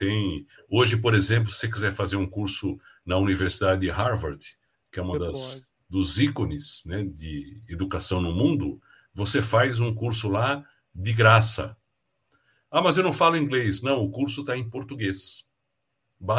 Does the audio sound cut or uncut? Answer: uncut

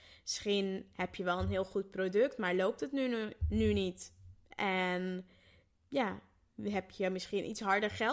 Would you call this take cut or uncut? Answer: uncut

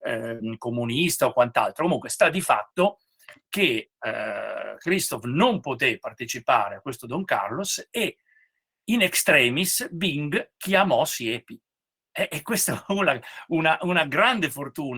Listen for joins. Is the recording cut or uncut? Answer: uncut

